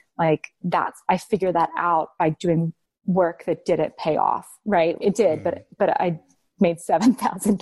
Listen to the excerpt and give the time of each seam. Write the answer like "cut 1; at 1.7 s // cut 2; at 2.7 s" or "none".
cut 1; at 5.0 s